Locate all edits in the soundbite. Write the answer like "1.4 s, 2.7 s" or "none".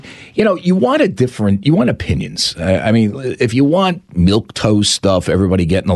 none